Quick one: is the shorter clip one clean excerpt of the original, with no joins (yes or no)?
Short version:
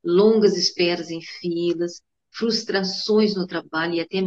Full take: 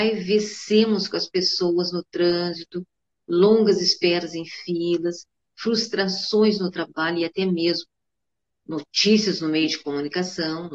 yes